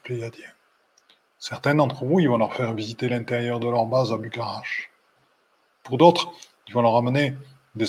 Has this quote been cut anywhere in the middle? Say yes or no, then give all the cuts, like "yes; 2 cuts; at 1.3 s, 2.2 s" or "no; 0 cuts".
no; 0 cuts